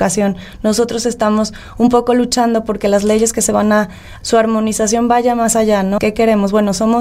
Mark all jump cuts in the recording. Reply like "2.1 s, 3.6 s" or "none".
4.2 s, 6.0 s